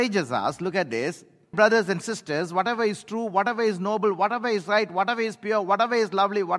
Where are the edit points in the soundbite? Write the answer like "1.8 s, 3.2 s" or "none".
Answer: 1.5 s